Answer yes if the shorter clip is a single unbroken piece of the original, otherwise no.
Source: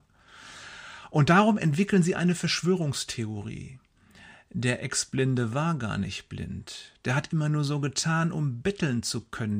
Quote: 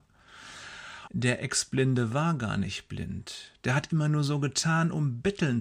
no